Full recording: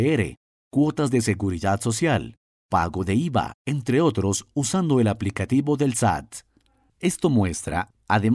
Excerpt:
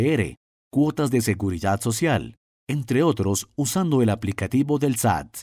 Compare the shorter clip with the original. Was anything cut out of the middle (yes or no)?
yes